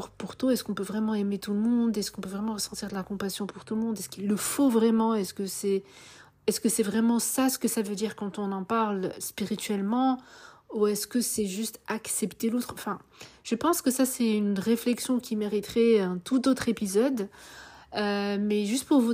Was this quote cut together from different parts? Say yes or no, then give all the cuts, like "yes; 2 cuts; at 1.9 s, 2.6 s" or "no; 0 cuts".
no; 0 cuts